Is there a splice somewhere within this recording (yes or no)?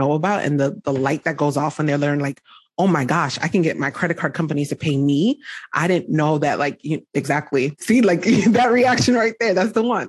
no